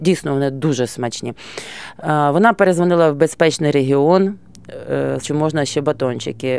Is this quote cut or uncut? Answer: cut